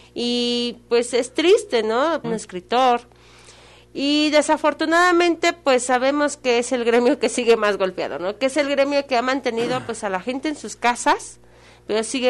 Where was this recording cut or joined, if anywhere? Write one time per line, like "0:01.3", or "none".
0:02.2